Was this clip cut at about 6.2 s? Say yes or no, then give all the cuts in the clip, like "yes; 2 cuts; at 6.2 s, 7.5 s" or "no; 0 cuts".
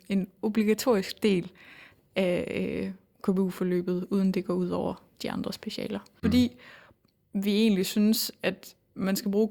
yes; 1 cut; at 6.2 s